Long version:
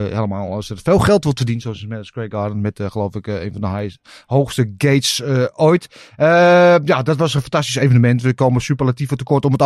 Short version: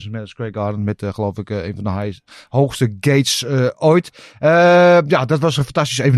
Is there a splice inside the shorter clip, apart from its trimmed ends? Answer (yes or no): no